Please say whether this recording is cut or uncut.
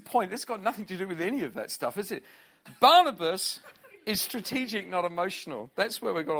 uncut